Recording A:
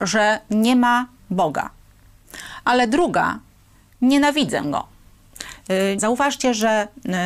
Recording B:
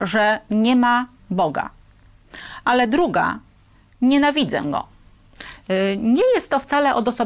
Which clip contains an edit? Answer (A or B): A